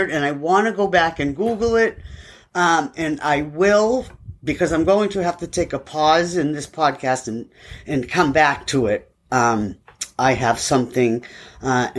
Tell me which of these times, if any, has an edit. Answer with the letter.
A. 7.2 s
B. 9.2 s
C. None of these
C